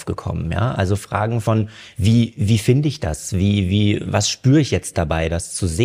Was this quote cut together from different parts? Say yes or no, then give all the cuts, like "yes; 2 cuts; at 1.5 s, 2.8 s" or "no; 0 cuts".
no; 0 cuts